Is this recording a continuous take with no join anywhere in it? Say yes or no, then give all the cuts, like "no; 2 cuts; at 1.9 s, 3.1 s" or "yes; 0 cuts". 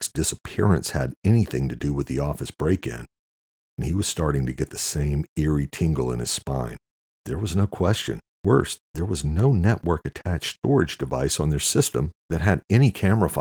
no; 3 cuts; at 3.7 s, 7.1 s, 8.3 s